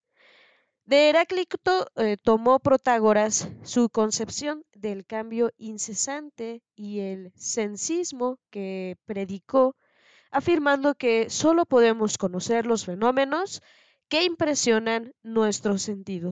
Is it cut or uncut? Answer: uncut